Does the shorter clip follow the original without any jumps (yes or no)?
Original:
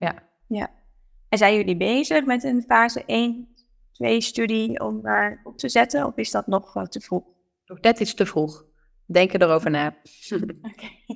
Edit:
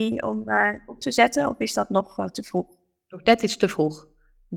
yes